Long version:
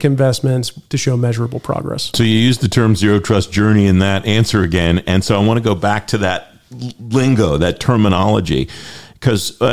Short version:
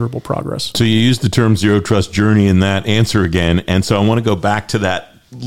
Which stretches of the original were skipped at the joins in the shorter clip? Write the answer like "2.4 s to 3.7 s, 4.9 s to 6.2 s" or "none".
none